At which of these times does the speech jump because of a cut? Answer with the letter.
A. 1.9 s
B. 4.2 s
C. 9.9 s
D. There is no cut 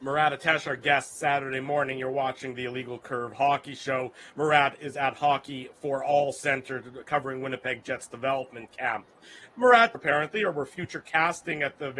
C